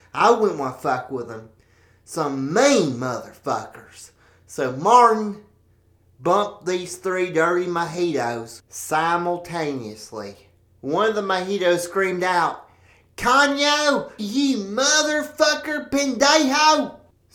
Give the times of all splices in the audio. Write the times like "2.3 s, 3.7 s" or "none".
14.2 s